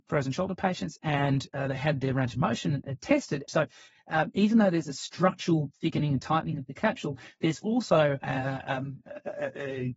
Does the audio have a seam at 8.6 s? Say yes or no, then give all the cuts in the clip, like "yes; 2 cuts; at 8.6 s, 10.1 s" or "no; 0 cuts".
no; 1 cut; at 3.5 s